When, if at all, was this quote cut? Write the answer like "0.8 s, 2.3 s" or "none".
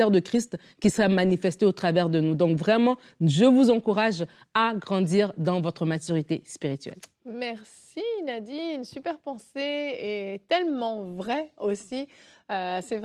none